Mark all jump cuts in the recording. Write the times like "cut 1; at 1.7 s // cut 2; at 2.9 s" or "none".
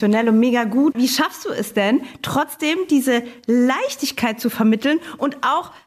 cut 1; at 0.9 s